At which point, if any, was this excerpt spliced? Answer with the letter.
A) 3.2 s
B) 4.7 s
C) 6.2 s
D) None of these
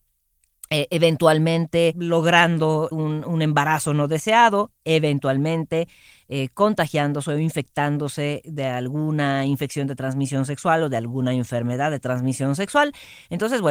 D